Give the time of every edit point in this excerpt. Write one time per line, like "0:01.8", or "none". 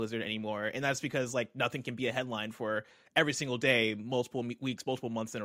none